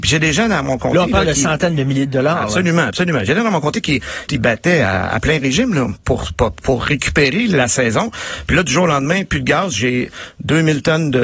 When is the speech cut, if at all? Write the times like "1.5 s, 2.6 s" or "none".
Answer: 4.3 s